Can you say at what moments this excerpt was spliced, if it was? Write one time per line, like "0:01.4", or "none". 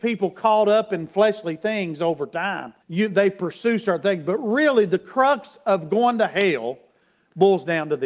0:02.8